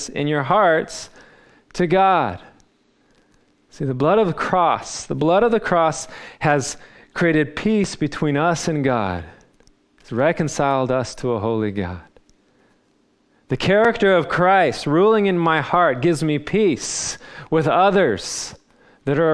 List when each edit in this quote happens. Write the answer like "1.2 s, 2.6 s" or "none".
none